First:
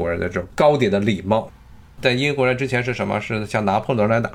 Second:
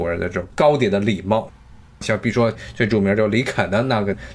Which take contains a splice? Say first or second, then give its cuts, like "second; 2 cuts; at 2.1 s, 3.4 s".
first; 1 cut; at 1.9 s